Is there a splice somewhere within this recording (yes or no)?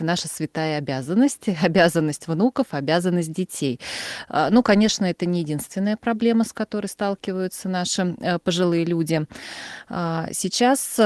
no